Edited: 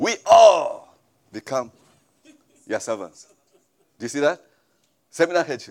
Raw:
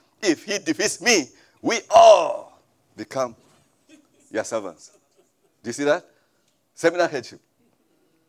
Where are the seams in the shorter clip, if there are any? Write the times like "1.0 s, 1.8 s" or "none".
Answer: none